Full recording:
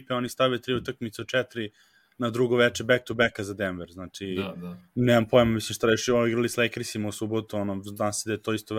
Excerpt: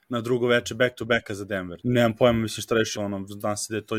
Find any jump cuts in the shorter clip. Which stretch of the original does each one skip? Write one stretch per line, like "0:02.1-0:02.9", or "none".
0:03.9-0:04.9
0:06.1-0:07.5